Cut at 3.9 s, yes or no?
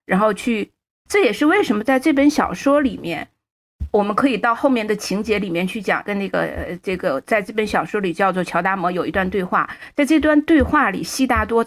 no